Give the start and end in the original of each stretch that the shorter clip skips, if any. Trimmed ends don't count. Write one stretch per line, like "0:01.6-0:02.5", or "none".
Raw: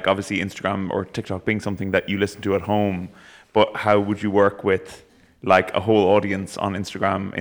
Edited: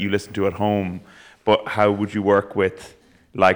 none